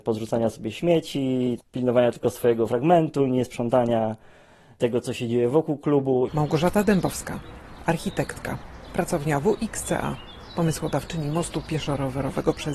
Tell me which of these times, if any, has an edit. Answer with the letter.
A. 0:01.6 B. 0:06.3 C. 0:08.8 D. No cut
B